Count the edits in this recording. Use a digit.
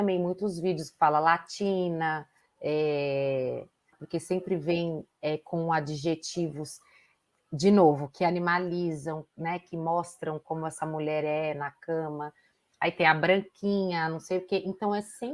1